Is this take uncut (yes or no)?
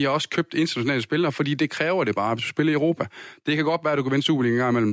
yes